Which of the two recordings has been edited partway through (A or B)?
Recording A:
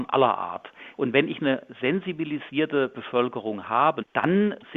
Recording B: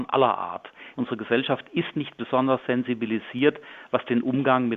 B